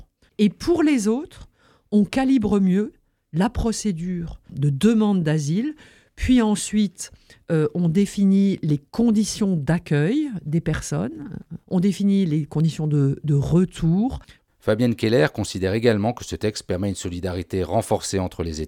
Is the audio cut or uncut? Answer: uncut